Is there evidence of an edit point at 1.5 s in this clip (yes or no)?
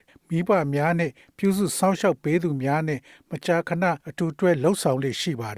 no